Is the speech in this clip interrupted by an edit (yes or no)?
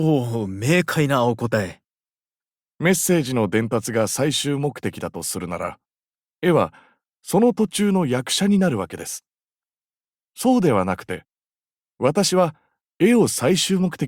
no